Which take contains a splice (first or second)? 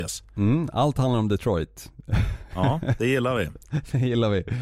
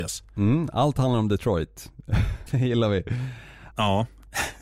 second